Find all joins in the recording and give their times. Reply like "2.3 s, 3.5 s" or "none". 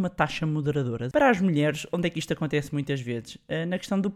1.1 s